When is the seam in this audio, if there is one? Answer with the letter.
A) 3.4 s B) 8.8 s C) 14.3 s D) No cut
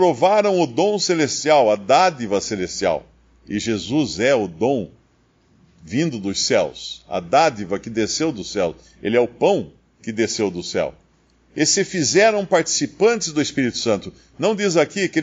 D